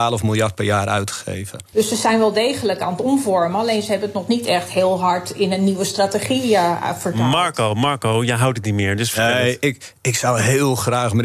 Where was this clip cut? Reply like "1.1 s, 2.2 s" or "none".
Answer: 1.7 s

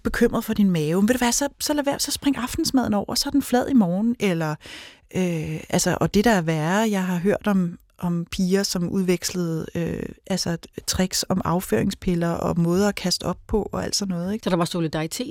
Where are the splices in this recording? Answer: 14.4 s

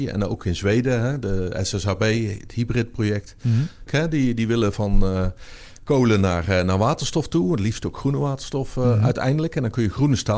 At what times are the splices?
3.9 s

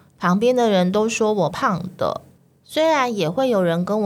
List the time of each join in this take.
1.5 s

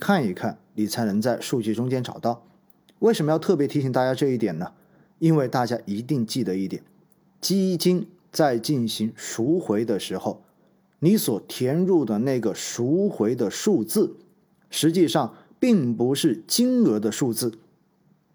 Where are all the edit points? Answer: none

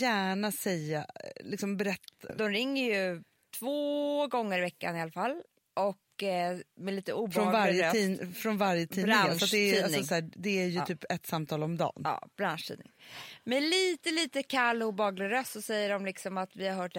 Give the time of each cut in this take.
2.3 s

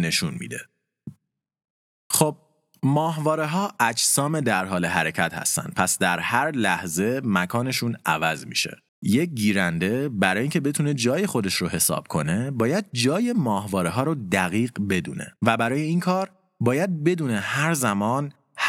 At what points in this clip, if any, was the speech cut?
2.0 s, 8.9 s, 15.4 s

